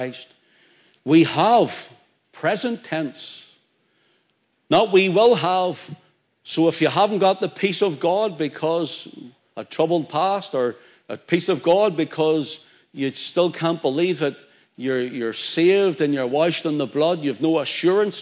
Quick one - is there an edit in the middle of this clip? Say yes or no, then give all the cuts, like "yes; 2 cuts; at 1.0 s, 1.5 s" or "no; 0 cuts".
no; 0 cuts